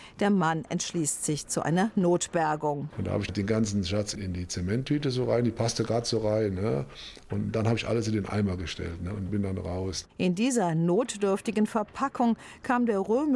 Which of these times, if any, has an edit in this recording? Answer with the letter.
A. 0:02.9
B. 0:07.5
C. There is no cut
A